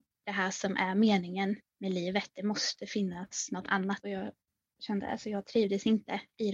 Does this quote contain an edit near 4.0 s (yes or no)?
yes